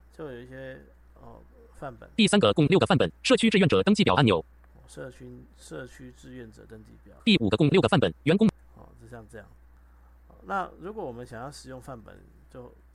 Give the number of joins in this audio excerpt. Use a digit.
1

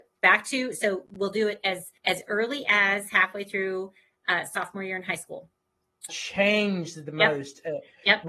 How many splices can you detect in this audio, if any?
2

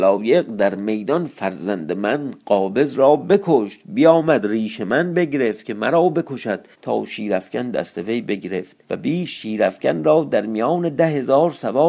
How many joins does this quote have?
2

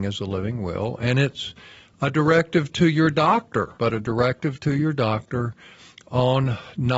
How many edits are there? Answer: 1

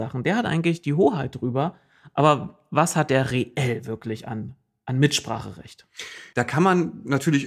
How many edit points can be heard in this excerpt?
1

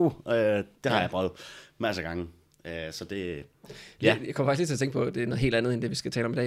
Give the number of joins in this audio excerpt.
0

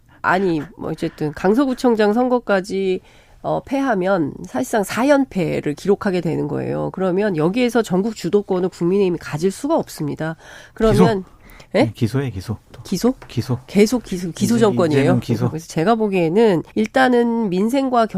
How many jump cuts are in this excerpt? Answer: 2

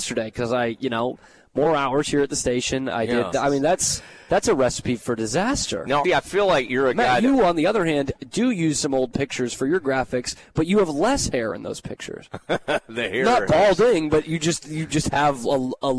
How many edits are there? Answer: 2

